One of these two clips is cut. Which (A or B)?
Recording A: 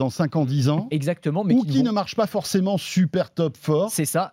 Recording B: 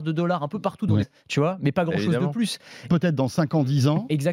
B